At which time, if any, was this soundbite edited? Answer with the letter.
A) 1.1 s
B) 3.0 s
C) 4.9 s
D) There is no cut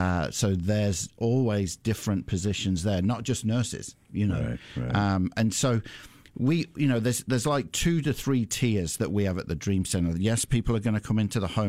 D